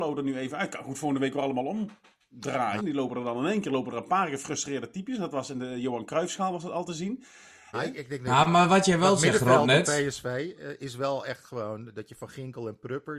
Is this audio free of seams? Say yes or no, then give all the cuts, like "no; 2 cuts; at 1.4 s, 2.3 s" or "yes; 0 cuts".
no; 2 cuts; at 2.8 s, 7.7 s